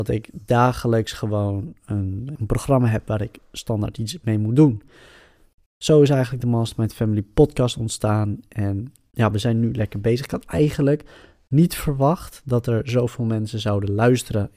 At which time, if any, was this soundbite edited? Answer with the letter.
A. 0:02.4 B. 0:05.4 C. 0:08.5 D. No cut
A